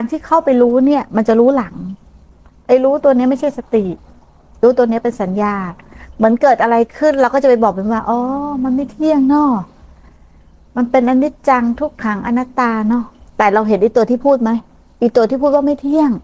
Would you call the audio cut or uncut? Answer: uncut